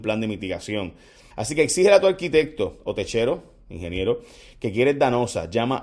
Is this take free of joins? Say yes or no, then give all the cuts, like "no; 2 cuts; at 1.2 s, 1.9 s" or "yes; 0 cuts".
no; 1 cut; at 1.3 s